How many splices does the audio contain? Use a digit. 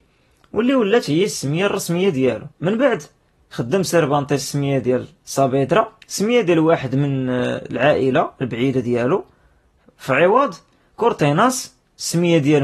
2